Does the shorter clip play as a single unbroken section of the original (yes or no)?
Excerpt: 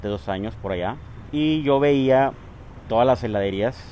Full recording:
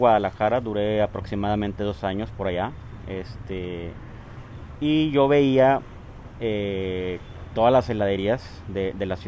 no